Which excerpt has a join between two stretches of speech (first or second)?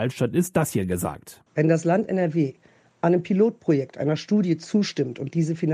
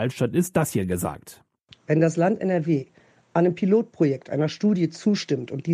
first